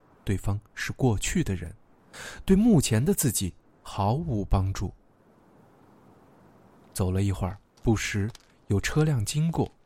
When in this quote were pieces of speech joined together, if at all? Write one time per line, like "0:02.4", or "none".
0:07.8